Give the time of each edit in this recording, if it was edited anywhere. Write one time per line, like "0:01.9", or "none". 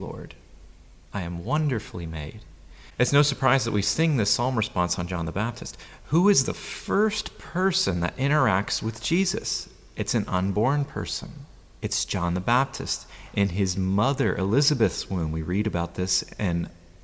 none

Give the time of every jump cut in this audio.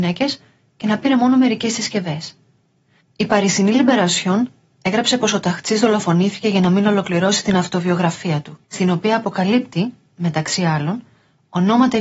0:03.0
0:08.6

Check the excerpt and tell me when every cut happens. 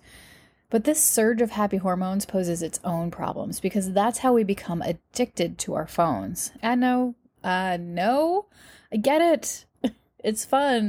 0:06.6

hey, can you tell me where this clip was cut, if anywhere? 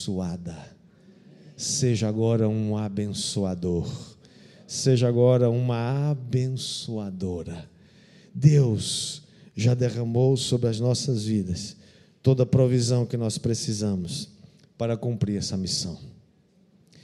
none

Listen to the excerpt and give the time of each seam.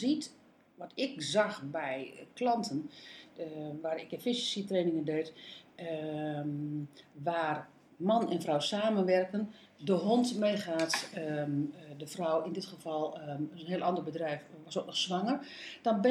none

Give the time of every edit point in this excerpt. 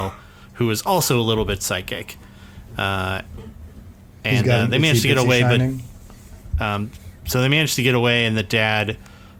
0:06.5

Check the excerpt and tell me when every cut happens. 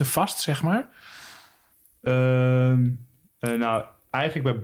none

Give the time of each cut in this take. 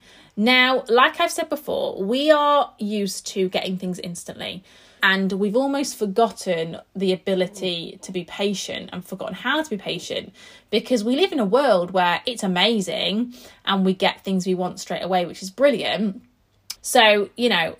0:05.0
0:16.8

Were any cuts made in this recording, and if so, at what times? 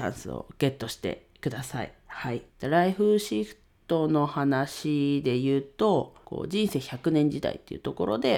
0:02.5
0:06.2

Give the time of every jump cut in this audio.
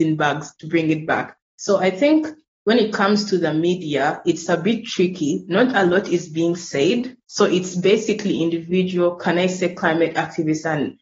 none

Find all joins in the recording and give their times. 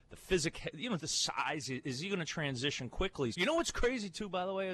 0:01.0
0:03.3

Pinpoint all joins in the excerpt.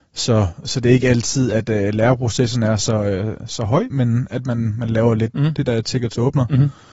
0:03.9
0:05.3

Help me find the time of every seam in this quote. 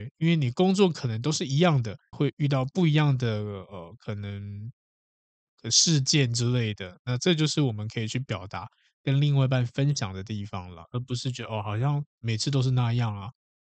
0:02.1

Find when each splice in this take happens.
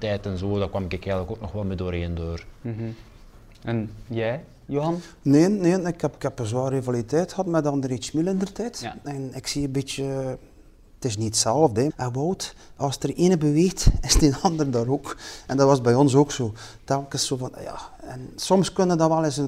0:06.2
0:11.9

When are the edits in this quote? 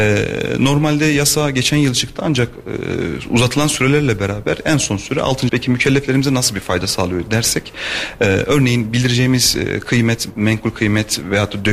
0:05.5
0:10.3

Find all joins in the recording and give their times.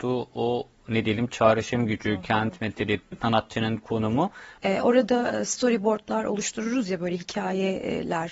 0:03.1
0:04.6

